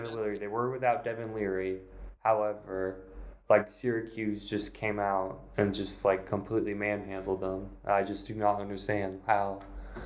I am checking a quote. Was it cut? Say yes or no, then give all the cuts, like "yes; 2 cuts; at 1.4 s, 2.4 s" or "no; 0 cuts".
no; 0 cuts